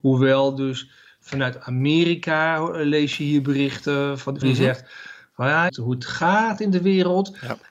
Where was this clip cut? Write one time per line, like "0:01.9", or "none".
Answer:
0:04.4
0:05.7